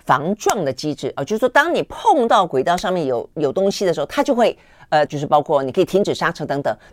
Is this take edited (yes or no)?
yes